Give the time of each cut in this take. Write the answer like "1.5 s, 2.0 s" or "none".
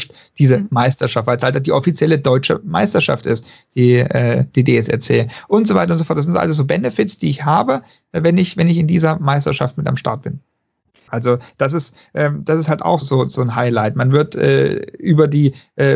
11.1 s, 13.0 s